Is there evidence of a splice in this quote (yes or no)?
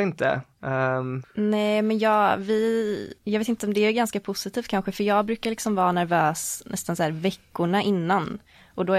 yes